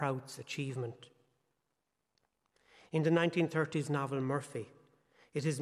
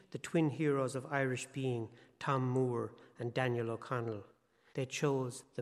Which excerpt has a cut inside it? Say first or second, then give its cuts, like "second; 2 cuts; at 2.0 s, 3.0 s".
second; 1 cut; at 4.7 s